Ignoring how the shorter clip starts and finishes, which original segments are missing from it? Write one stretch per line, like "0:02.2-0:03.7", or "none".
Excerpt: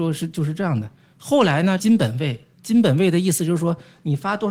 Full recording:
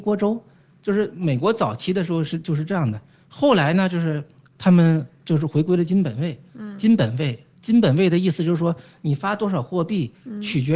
0:03.9-0:06.8